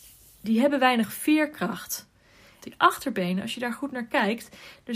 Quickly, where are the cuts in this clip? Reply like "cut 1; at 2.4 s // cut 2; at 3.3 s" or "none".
cut 1; at 2.6 s